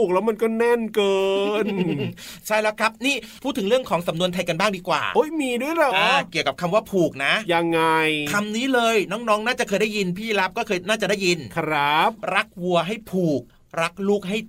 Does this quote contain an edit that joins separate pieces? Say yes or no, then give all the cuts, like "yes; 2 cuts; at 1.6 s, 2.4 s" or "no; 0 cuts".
yes; 1 cut; at 5.9 s